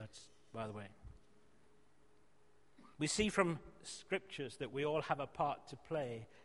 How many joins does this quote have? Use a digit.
1